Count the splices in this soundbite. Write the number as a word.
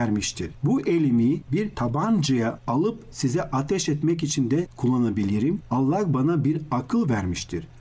one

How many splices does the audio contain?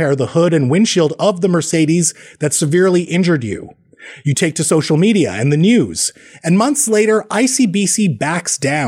zero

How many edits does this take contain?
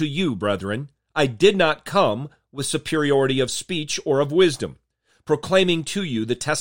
zero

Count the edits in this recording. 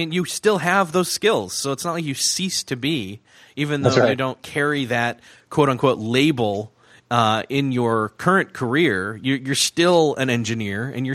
zero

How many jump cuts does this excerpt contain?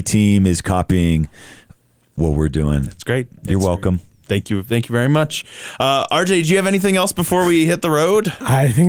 zero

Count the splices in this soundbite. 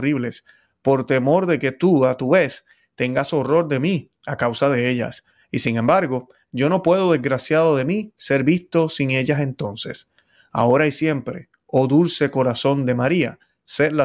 zero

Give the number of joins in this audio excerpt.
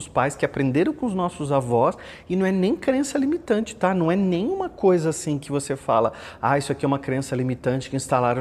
zero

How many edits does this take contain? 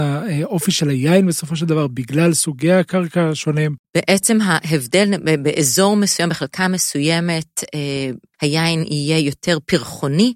two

